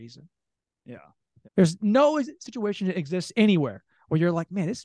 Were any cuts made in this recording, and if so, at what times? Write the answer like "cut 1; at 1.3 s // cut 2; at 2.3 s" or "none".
cut 1; at 1.4 s